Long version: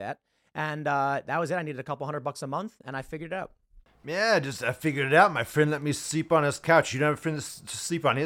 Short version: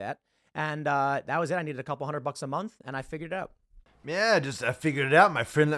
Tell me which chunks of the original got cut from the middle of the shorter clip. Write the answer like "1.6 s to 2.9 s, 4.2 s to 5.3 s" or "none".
none